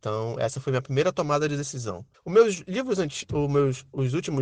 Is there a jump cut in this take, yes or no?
yes